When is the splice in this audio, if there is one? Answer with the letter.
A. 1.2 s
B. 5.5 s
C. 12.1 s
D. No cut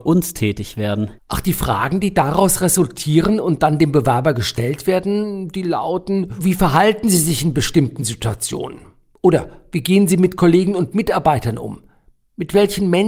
A